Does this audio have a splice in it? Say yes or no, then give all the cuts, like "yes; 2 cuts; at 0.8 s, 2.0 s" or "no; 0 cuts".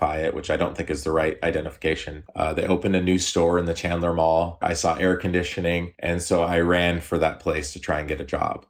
yes; 1 cut; at 2.2 s